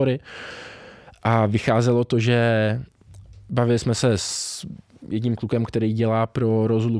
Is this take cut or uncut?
uncut